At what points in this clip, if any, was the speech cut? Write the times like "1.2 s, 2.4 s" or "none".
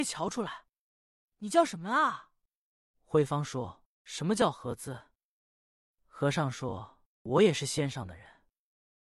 2.9 s